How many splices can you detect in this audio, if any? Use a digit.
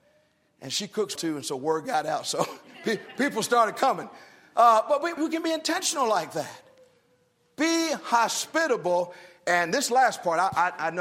2